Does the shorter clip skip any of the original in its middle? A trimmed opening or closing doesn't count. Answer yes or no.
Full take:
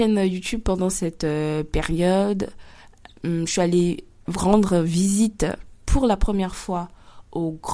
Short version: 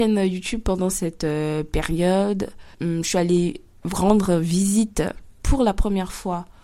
yes